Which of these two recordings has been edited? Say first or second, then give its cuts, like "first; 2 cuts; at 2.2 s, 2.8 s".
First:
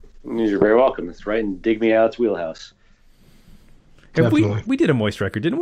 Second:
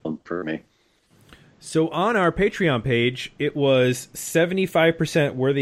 first; 1 cut; at 4.6 s